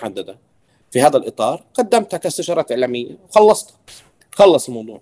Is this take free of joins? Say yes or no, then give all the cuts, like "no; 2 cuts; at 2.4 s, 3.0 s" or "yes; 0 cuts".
yes; 0 cuts